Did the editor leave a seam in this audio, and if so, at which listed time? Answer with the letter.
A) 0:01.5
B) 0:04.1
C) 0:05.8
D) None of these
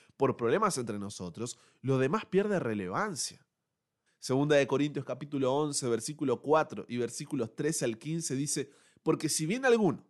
B